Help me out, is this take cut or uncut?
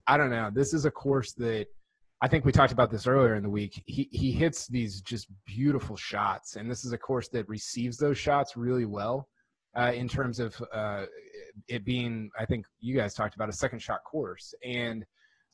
uncut